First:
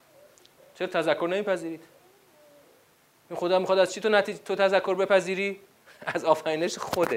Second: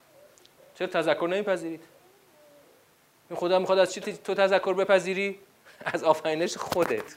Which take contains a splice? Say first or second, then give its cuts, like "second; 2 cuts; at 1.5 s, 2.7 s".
second; 1 cut; at 4.0 s